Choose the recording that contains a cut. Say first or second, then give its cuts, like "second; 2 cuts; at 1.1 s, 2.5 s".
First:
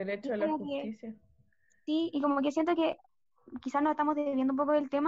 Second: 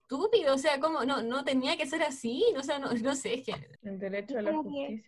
second; 1 cut; at 3.8 s